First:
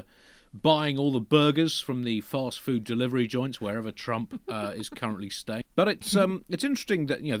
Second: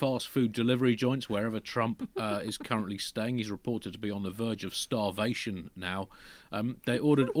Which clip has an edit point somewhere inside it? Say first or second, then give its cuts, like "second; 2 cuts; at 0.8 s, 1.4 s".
first; 1 cut; at 5.6 s